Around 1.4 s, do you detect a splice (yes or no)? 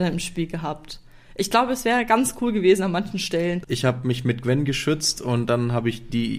no